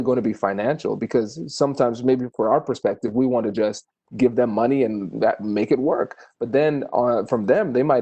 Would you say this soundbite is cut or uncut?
uncut